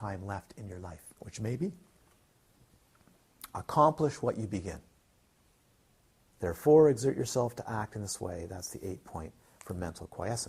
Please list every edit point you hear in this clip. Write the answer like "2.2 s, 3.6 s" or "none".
1.2 s, 6.3 s